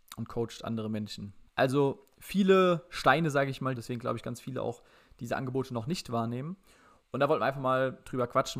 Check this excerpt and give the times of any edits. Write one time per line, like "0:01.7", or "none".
0:01.5
0:03.7